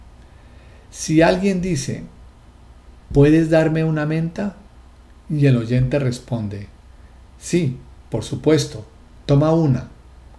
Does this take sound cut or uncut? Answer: uncut